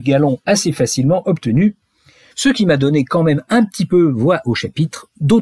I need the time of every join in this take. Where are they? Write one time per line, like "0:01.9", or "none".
0:02.3